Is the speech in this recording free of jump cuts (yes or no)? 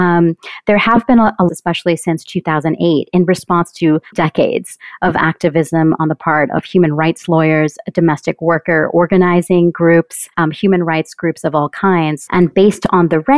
no